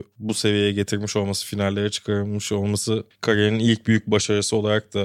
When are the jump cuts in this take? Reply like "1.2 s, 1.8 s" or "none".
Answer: none